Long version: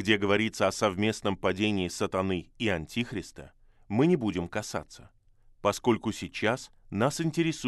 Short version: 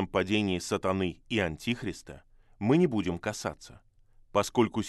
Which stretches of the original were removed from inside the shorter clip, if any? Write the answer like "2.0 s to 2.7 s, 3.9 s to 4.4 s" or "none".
none

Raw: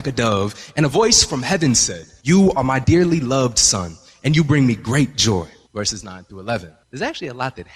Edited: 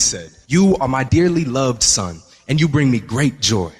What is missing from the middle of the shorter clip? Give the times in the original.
none

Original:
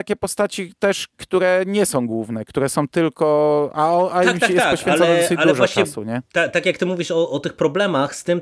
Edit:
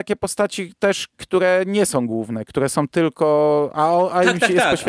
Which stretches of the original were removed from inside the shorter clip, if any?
none

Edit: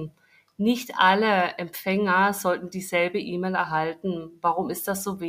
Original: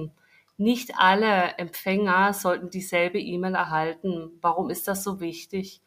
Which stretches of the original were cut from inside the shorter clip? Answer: none

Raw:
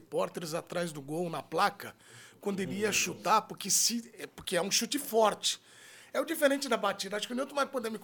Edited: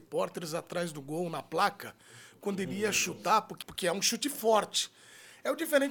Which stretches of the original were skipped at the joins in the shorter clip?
3.6 s to 4.3 s

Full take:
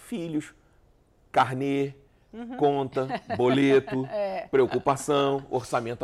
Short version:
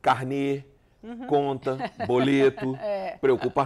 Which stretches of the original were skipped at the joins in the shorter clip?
none

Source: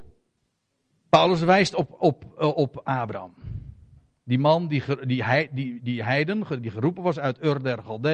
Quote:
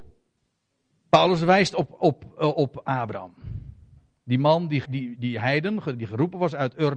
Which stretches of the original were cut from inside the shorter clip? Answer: 4.9 s to 5.5 s

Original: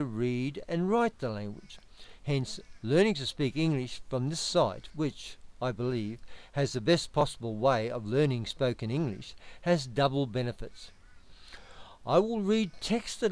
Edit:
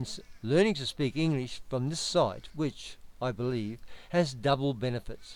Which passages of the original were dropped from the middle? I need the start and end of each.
6.5 s to 9.6 s

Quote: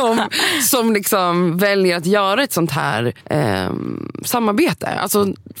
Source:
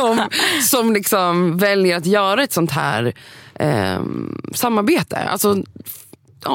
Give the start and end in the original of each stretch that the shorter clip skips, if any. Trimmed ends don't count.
3.2 s to 3.5 s

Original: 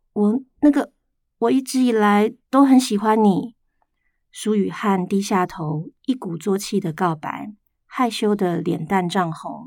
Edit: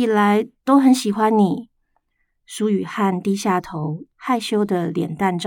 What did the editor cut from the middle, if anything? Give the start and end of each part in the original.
6.0 s to 7.8 s

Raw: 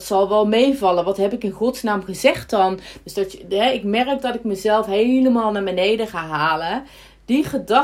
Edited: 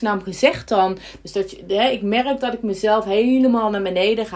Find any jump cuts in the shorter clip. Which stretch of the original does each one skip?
none

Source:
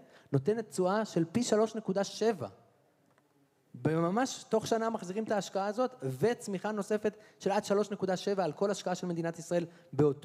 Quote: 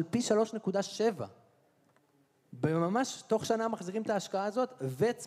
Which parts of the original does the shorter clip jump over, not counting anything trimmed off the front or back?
none

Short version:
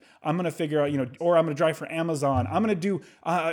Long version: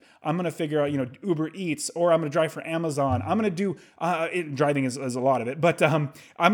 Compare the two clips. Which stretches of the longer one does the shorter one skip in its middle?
1.2 s to 1.9 s

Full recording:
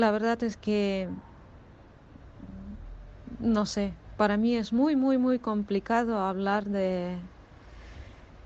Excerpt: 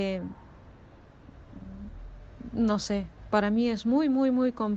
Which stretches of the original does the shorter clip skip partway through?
none

